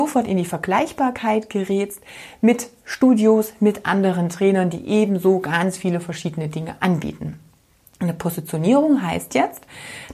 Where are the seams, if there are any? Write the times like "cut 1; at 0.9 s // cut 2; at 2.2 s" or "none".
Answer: none